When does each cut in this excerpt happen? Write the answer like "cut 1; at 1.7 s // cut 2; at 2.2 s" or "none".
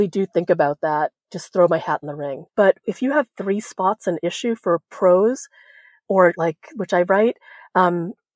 cut 1; at 2.5 s // cut 2; at 6.3 s